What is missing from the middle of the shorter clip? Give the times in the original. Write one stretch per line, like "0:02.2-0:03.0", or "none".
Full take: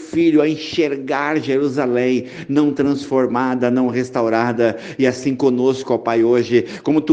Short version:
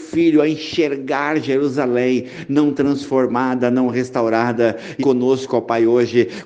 0:05.0-0:05.4